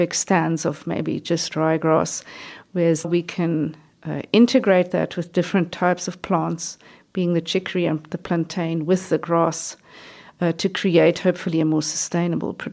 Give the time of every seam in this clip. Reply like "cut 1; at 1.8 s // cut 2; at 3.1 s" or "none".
cut 1; at 3.0 s